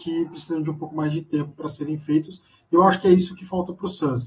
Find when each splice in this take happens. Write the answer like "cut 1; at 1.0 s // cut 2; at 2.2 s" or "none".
none